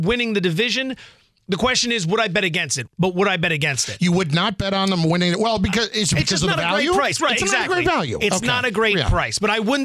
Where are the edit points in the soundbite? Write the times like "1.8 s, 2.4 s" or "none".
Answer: 2.9 s